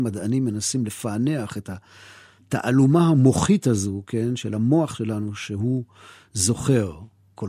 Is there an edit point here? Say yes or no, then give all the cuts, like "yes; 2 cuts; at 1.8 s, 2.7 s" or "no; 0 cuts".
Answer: no; 0 cuts